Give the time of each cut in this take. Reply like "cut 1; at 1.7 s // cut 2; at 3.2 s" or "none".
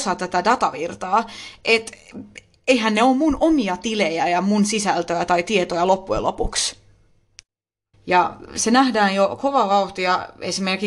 cut 1; at 7.9 s